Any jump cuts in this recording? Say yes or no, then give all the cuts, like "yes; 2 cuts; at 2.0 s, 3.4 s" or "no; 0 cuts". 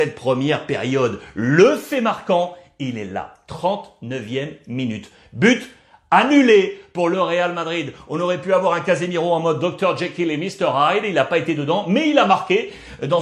no; 0 cuts